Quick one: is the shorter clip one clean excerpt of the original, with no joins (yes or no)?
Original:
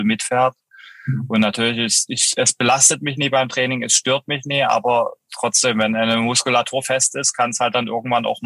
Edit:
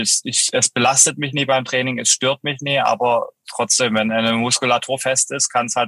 yes